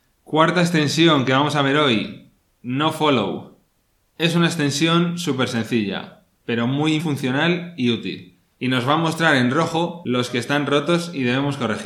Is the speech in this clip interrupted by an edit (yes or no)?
yes